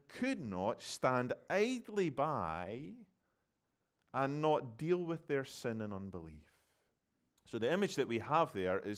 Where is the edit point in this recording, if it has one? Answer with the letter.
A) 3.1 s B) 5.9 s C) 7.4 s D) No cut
C